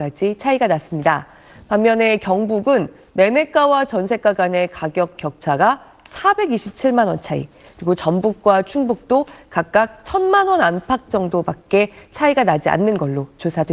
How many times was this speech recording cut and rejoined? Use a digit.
0